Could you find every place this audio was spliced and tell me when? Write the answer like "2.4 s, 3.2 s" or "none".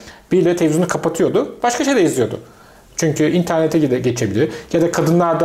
none